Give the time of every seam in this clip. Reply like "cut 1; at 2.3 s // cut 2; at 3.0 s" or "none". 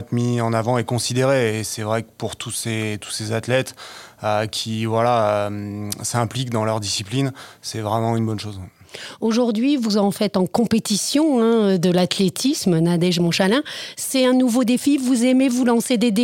none